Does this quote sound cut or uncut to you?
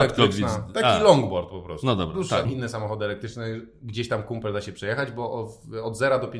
cut